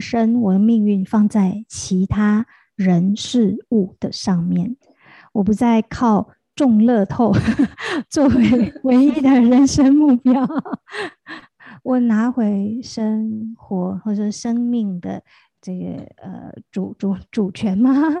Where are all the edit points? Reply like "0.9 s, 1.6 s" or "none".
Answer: none